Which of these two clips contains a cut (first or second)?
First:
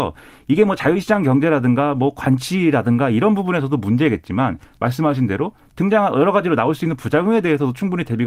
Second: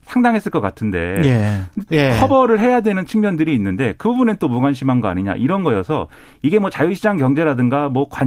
second